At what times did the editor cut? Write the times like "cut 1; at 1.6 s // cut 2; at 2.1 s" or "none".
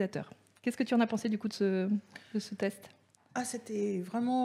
none